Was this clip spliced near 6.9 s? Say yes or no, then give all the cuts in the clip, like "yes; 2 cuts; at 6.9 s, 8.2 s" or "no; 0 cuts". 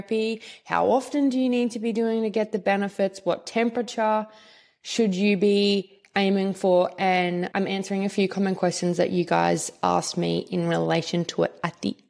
no; 0 cuts